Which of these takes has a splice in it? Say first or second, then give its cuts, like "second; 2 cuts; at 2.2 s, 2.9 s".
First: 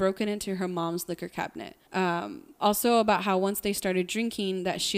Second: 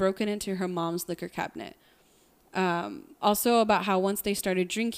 first; 1 cut; at 1.9 s